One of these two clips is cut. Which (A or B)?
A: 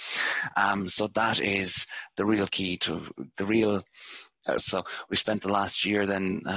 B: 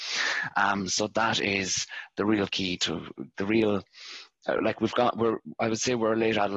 A